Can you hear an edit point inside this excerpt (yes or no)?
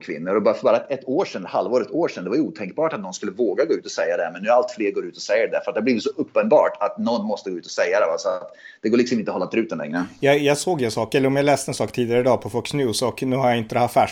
no